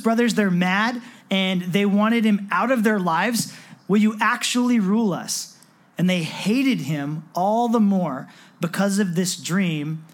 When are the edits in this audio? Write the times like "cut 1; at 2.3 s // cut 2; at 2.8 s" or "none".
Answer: cut 1; at 3.8 s